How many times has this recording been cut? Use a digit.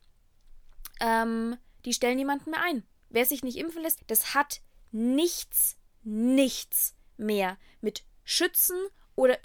2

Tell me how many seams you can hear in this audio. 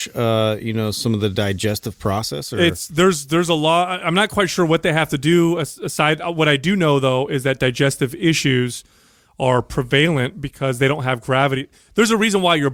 0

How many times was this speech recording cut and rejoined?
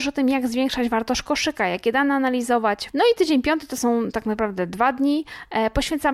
1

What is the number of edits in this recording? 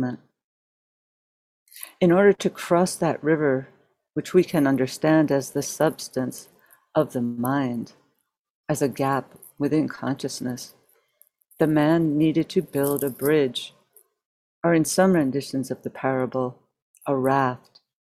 0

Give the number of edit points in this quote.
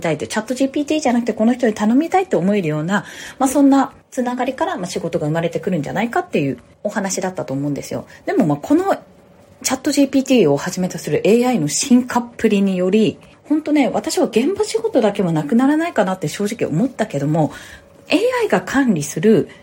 0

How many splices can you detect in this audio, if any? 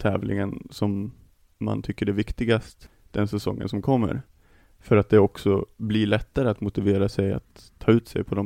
0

